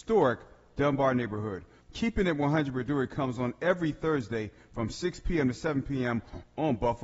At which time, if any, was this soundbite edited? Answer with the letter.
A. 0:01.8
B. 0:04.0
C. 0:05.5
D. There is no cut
A